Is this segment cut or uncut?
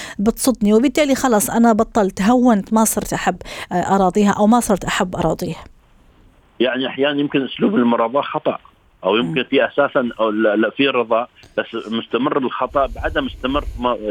uncut